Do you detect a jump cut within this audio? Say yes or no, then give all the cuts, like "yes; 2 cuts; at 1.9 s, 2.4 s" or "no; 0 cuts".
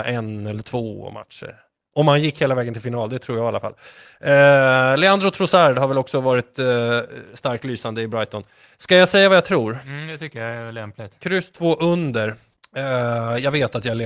no; 0 cuts